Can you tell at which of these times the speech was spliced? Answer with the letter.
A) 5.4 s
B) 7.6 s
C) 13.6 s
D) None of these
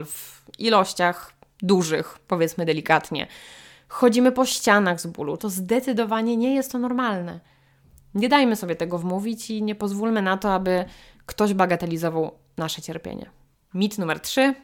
A